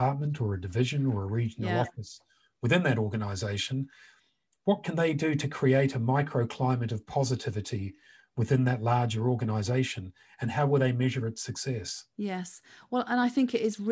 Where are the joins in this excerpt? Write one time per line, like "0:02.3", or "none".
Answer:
none

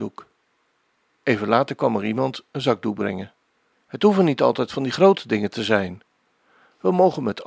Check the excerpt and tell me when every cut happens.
0:03.7

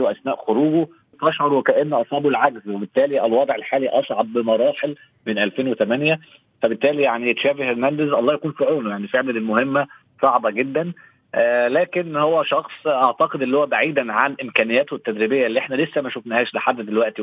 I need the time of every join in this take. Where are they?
0:01.1

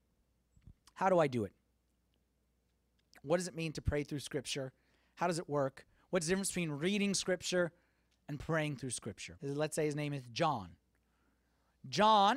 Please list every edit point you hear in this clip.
0:09.4

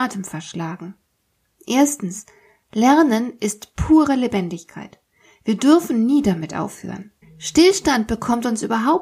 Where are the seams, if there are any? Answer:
0:07.2

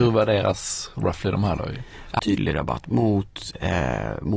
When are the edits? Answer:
0:02.2

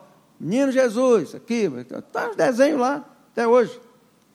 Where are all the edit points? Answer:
0:02.0

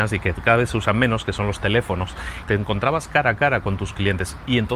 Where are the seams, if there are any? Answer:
0:02.4

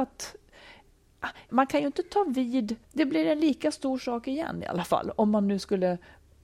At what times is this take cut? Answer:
0:01.5
0:02.8

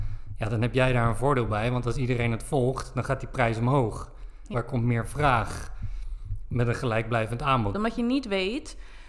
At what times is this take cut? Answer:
0:04.5
0:07.7

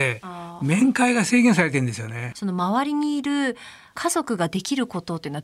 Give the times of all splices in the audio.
0:02.3

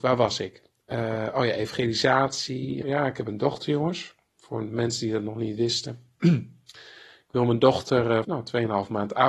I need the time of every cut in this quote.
0:02.8
0:08.2

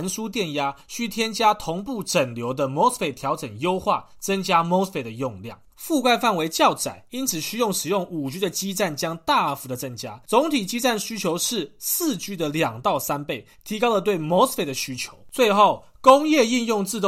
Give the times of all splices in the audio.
0:05.7
0:15.3

